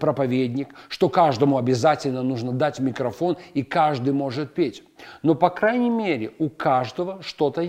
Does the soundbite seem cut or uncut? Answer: uncut